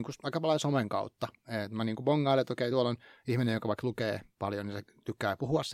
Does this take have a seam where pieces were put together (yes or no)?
no